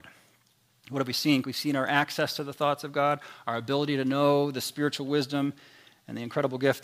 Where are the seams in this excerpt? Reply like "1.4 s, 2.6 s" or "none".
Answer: 1.4 s